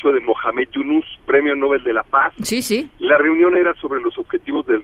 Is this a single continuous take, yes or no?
no